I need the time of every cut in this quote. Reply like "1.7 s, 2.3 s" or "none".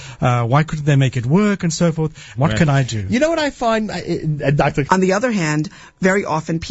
2.3 s, 4.9 s